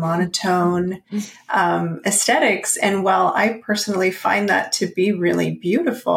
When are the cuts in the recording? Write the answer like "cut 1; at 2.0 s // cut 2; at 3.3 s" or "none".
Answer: none